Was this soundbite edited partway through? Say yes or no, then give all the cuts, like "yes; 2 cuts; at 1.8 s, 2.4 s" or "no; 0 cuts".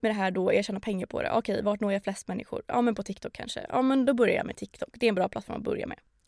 no; 0 cuts